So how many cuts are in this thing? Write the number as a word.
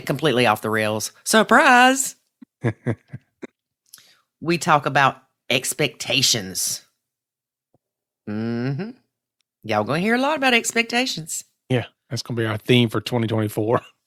zero